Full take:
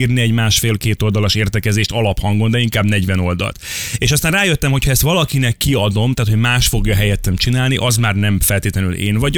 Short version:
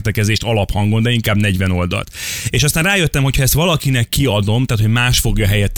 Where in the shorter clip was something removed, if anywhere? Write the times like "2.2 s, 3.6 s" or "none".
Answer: none